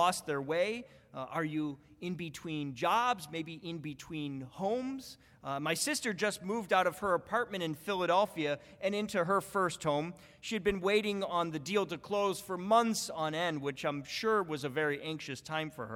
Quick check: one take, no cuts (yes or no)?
yes